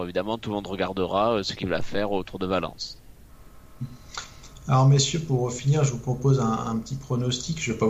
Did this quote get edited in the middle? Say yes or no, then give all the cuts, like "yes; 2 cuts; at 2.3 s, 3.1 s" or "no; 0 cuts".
no; 0 cuts